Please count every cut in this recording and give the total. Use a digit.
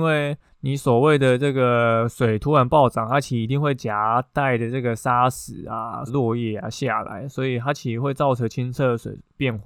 1